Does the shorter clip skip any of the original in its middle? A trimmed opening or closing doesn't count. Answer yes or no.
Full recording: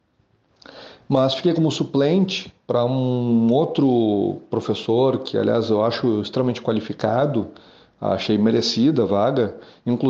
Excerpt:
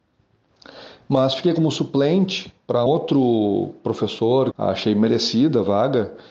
yes